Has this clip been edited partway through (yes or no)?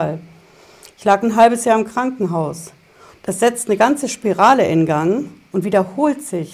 yes